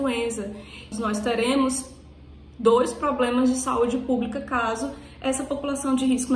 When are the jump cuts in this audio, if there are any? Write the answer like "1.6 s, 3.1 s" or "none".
0.9 s